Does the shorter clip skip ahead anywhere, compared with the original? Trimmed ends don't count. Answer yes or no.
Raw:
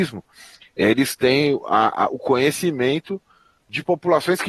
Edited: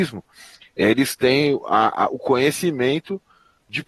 no